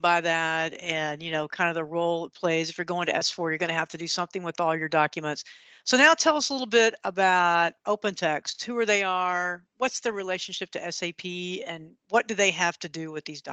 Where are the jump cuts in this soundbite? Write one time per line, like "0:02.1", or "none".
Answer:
none

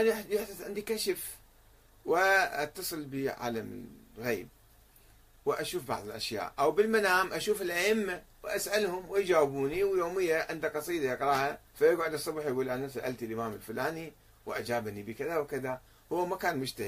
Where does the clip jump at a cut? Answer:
0:11.7

